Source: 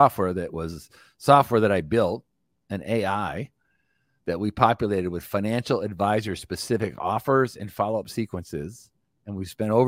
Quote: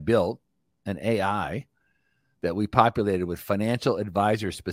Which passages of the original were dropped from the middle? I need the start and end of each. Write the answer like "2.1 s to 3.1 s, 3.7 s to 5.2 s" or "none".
none